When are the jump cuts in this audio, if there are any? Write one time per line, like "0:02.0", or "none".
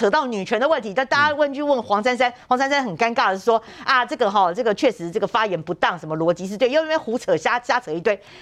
none